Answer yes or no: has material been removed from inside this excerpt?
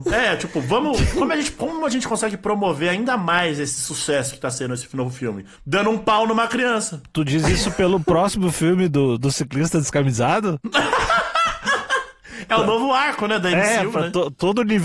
no